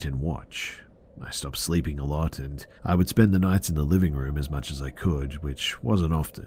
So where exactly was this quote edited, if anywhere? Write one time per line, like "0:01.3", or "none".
0:01.0
0:02.8